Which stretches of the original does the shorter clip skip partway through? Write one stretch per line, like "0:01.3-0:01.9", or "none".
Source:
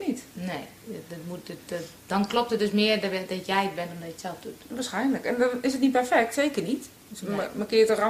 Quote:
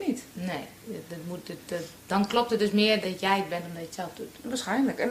0:03.0-0:03.3

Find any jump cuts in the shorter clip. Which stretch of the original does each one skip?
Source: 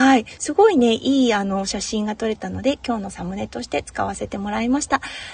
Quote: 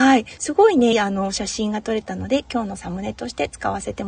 0:00.9-0:01.3

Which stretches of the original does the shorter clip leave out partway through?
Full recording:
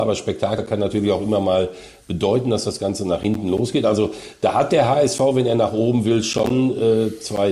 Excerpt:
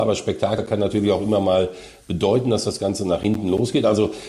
none

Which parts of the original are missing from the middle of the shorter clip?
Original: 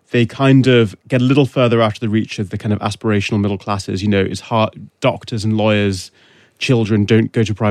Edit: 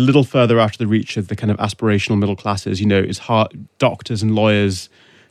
none

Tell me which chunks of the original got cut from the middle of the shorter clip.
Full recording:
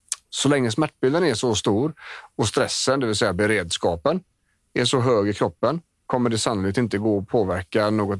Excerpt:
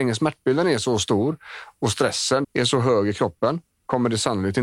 0:03.0-0:04.6

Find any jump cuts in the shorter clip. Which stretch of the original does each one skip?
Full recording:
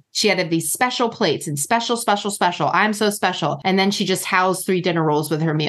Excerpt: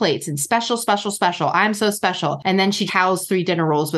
0:04.1-0:04.2

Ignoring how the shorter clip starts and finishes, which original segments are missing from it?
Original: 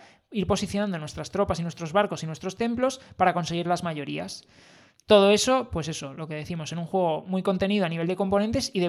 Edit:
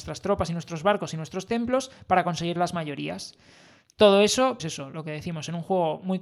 0:05.7-0:05.8

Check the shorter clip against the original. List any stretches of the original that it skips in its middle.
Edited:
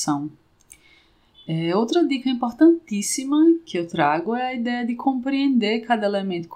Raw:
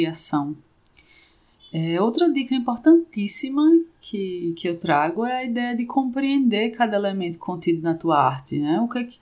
0:03.9-0:04.6

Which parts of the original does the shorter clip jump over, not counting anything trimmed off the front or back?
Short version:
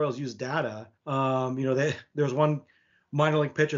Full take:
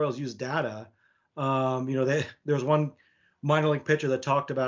0:01.0-0:01.3

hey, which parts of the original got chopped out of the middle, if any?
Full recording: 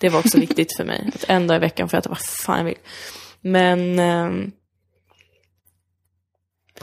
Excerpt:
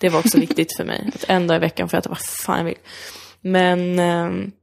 none

